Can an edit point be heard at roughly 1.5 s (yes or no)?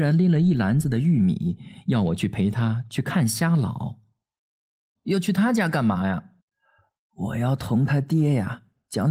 no